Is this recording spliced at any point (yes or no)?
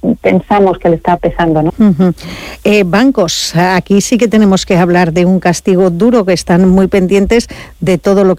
yes